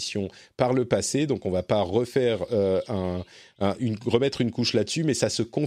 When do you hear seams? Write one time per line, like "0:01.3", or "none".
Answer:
none